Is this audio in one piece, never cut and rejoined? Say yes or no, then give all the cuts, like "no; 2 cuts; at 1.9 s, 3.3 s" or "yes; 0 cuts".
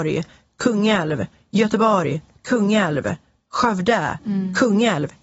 yes; 0 cuts